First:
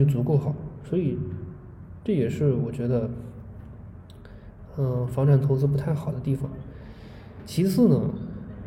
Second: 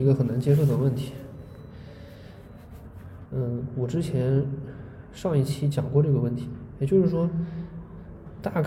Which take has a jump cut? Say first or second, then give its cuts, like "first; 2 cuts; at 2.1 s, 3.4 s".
second; 1 cut; at 3.3 s